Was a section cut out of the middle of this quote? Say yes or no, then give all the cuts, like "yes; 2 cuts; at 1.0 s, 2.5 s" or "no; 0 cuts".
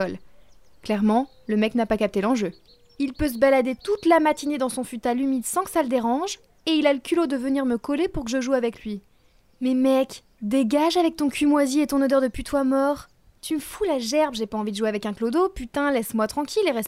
no; 0 cuts